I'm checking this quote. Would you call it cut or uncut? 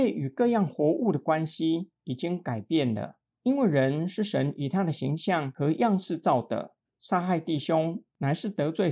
cut